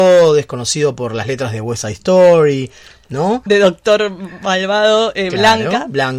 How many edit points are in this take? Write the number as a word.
one